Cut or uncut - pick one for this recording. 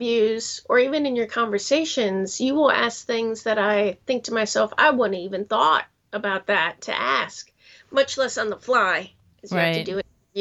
uncut